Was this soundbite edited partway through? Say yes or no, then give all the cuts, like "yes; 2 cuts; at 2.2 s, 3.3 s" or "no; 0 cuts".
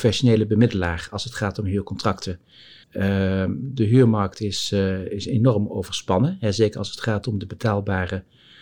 yes; 1 cut; at 2.8 s